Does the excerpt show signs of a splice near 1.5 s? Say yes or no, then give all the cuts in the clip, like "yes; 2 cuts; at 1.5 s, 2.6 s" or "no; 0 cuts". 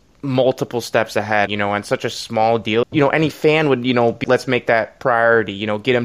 yes; 3 cuts; at 1.5 s, 2.8 s, 4.2 s